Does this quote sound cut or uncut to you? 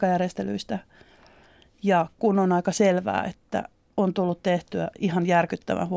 uncut